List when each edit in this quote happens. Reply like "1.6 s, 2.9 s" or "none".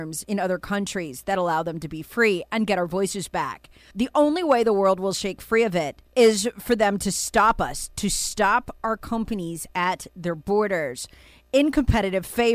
3.9 s, 6.1 s